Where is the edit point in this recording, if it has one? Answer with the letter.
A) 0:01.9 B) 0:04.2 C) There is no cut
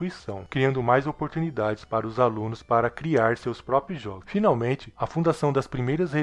B